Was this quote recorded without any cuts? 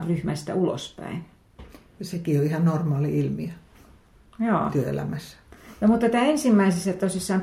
yes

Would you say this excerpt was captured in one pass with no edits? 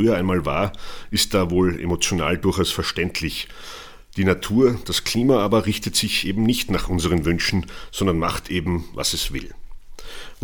yes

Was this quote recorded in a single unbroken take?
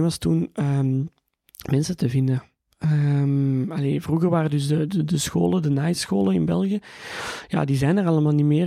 yes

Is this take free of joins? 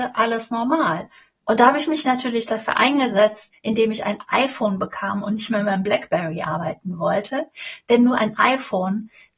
no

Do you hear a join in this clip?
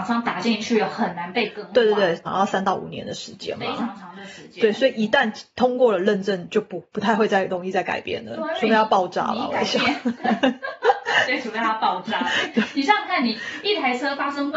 yes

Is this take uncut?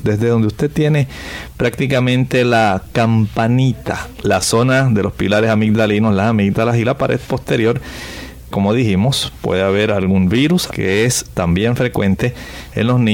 no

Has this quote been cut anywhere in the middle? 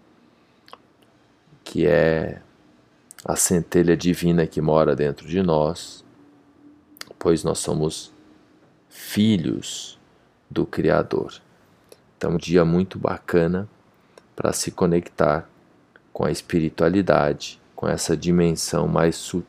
yes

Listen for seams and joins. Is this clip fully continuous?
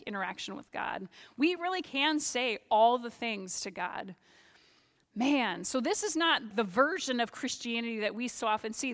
no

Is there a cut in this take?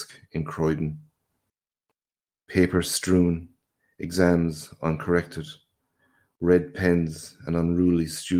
no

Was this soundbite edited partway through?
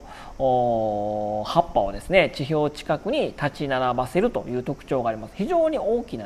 no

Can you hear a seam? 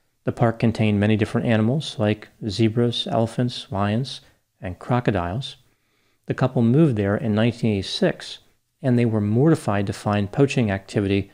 no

